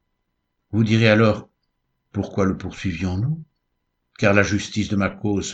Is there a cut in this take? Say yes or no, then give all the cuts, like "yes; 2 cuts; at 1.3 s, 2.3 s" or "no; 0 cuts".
no; 0 cuts